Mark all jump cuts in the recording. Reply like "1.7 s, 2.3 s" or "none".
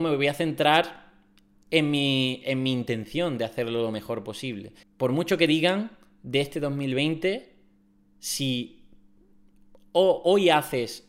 4.8 s